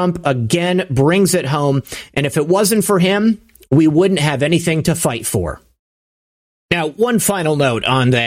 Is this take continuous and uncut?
yes; 0 cuts

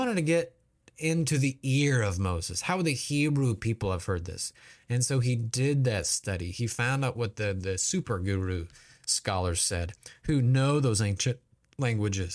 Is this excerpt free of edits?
yes; 0 cuts

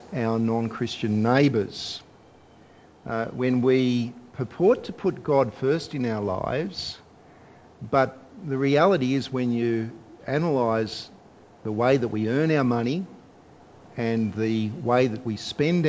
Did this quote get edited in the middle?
no; 0 cuts

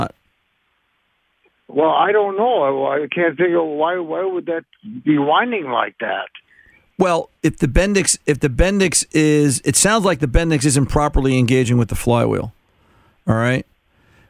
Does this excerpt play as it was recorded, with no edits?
yes; 0 cuts

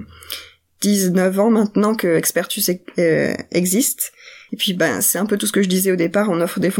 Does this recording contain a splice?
yes; 1 cut; at 4.5 s

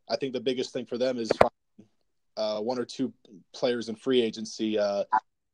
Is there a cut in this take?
no; 0 cuts

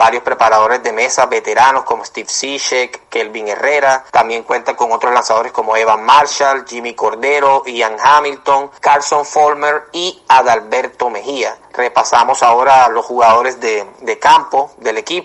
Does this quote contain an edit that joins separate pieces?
no; 0 cuts

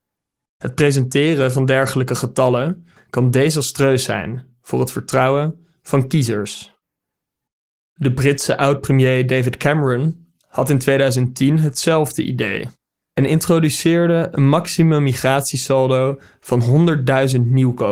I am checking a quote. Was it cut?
yes; 1 cut; at 3.0 s

